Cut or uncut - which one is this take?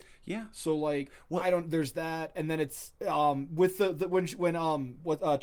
cut